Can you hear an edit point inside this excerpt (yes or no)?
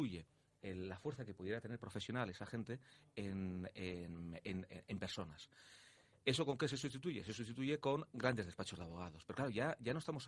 no